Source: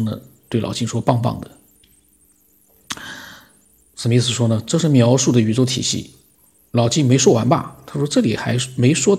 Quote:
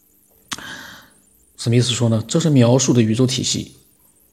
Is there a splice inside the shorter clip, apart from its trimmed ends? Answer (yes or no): no